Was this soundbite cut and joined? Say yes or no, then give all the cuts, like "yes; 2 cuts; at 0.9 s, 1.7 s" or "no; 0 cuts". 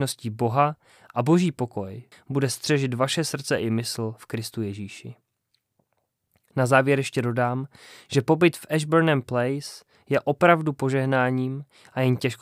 yes; 1 cut; at 2.1 s